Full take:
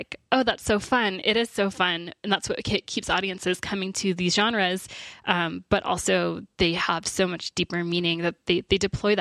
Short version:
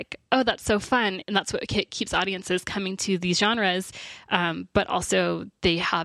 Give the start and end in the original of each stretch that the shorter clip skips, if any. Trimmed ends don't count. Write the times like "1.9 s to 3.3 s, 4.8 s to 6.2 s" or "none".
1.2 s to 2.2 s